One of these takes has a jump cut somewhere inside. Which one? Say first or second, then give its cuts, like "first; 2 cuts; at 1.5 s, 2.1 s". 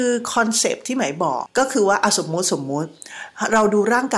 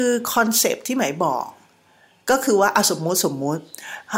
first; 1 cut; at 1.5 s